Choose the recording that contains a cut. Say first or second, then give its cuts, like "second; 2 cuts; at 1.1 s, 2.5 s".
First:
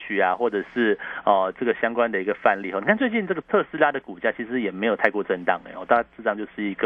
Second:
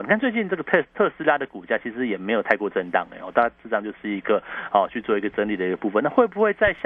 first; 1 cut; at 3.4 s